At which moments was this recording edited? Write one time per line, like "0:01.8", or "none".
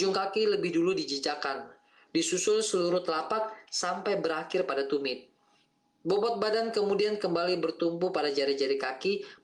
0:02.1